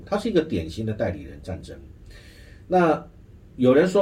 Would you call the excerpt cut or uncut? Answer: uncut